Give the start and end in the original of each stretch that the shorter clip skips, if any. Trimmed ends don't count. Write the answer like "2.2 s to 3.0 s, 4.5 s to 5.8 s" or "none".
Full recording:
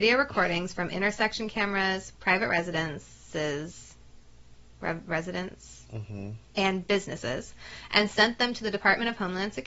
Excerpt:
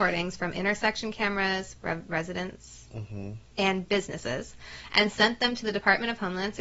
2.1 s to 4.8 s

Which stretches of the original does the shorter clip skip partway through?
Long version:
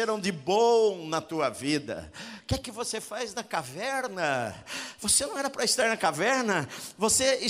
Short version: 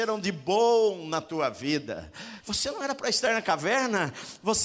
2.4 s to 5.0 s

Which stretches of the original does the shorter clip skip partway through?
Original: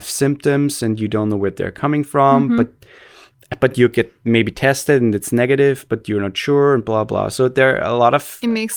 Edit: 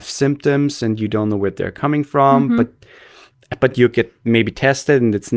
none

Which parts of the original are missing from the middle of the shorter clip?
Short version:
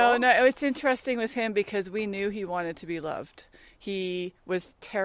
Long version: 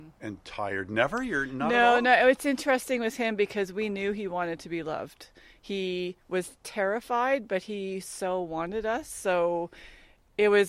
none

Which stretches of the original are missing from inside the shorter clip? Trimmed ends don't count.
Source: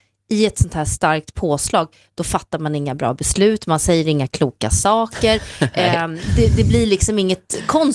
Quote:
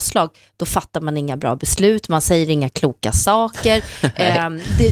none

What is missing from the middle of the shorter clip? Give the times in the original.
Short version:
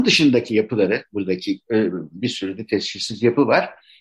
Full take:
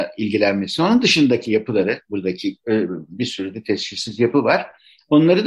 none

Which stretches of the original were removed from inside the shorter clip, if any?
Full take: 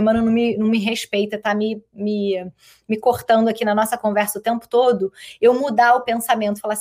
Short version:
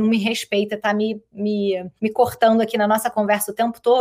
2.6 s to 2.8 s

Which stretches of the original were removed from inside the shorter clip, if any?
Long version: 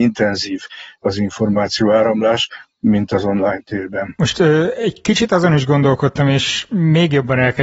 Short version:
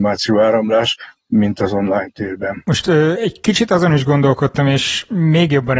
4.7 s to 4.8 s

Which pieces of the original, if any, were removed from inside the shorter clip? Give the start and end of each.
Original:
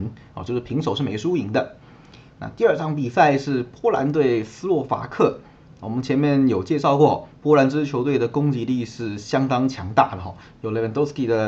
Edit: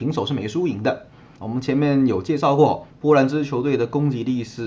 2.1 s to 5.8 s

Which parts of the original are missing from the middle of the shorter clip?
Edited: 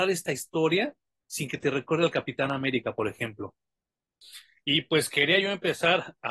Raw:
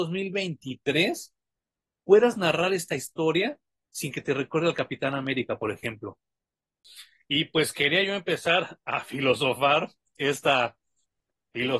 none

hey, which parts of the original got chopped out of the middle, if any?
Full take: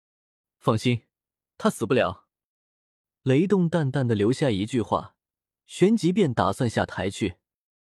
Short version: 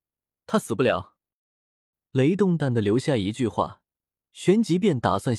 3.7 s to 3.9 s

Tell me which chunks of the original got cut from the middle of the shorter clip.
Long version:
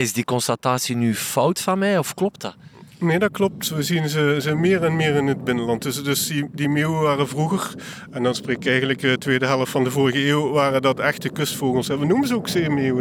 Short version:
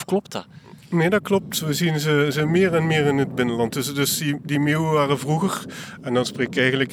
none

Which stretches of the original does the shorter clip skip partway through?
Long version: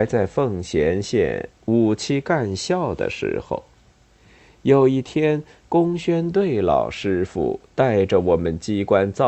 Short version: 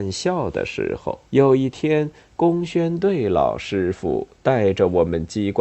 3.7 s to 4.6 s

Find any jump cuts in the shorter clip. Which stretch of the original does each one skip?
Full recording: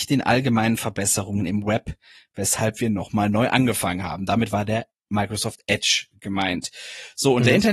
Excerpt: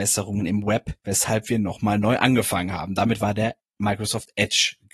2.0 s to 2.3 s

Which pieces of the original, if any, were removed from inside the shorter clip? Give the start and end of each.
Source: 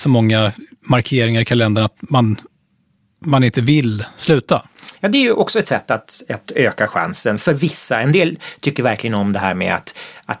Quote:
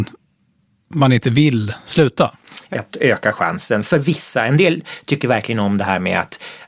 5.0 s to 6.3 s

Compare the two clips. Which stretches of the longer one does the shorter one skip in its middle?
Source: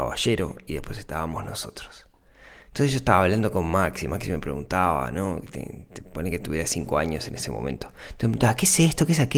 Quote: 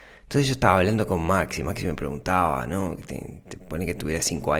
none

